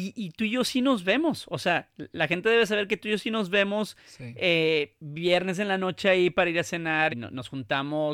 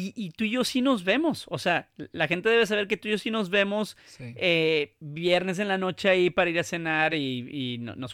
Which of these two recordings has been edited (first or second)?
first